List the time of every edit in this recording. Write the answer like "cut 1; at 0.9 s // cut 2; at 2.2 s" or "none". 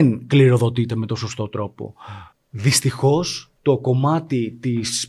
cut 1; at 2.3 s